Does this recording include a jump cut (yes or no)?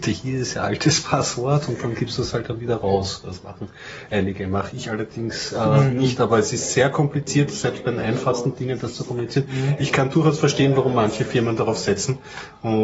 no